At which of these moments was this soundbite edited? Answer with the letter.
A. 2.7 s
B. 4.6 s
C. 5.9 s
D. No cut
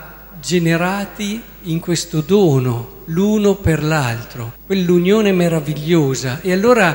B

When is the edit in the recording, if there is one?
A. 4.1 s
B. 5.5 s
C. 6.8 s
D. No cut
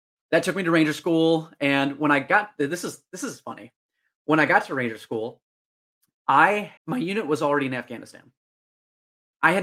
C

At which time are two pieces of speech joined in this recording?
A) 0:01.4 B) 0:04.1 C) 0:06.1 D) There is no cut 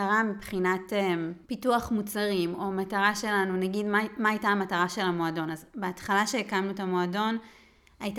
A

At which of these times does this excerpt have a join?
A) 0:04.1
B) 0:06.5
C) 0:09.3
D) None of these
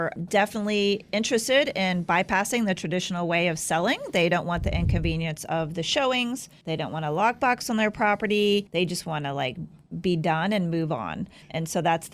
D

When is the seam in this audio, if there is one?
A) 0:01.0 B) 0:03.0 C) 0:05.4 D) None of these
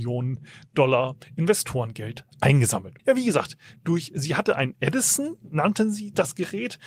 B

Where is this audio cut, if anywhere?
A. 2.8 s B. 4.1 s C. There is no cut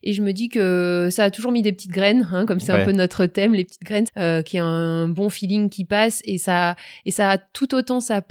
B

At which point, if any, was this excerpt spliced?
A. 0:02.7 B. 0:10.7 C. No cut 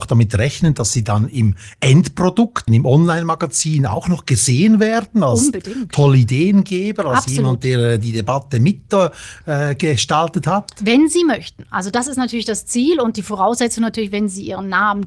A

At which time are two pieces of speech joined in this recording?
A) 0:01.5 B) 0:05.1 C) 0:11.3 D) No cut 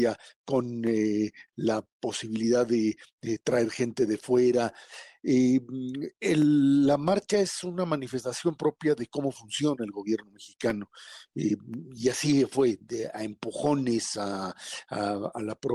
D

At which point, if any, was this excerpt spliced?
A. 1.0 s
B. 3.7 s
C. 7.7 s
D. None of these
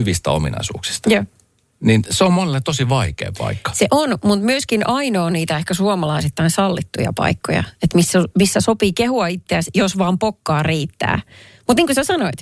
D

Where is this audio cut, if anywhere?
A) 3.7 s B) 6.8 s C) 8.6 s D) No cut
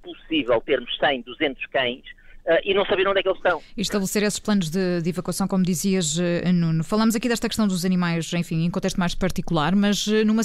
D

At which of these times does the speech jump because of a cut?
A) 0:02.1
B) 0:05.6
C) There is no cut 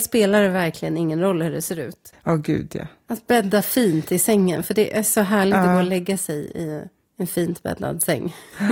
A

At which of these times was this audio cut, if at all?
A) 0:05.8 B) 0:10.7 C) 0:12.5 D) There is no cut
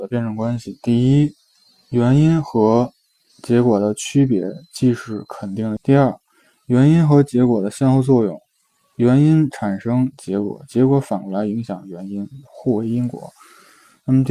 A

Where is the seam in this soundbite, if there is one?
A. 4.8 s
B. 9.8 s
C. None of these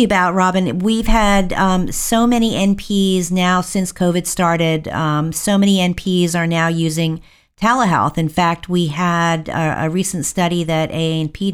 C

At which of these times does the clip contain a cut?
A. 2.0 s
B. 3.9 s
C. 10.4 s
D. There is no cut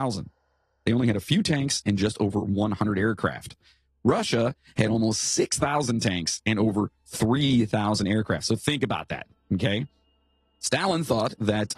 D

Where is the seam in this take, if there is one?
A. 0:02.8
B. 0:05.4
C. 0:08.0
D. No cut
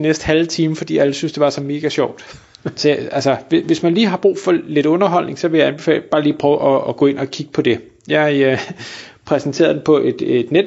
A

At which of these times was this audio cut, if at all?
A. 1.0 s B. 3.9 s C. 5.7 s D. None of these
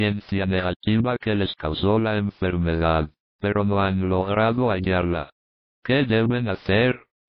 D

